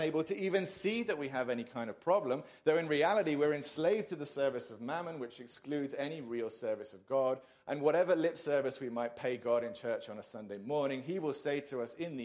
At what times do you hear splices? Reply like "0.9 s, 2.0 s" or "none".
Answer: none